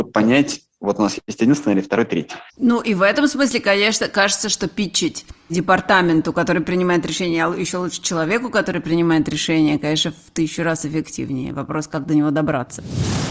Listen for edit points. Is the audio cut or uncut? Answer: cut